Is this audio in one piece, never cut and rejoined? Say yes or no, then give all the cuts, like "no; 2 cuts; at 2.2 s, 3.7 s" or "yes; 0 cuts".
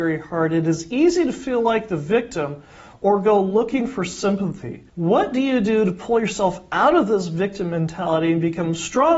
no; 1 cut; at 4.9 s